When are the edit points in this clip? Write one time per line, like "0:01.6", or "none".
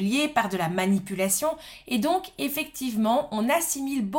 none